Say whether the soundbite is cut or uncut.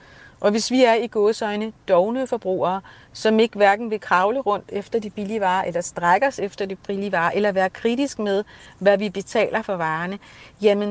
uncut